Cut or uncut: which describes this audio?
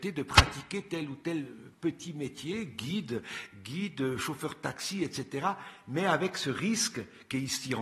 uncut